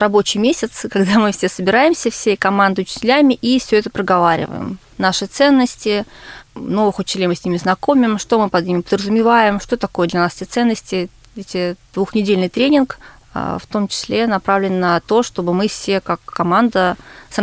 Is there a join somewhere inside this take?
no; 0 cuts

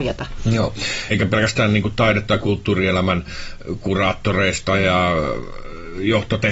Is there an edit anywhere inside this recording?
yes; 1 cut; at 1.1 s

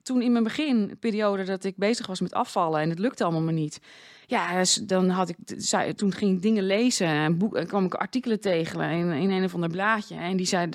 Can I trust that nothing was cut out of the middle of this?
yes; 0 cuts

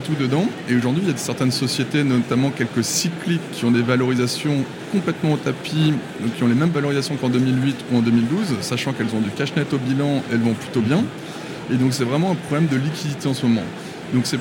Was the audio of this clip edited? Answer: no; 0 cuts

